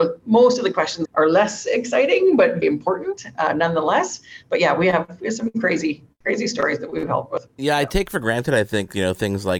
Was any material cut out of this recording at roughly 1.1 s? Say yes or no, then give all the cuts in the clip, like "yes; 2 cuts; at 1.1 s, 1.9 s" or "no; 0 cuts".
yes; 2 cuts; at 1.1 s, 2.6 s